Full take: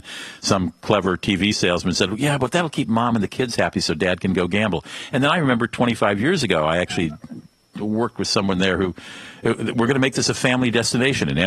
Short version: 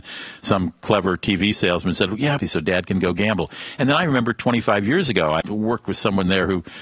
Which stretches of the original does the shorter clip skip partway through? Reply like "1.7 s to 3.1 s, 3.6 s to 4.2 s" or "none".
2.4 s to 3.7 s, 6.7 s to 7.7 s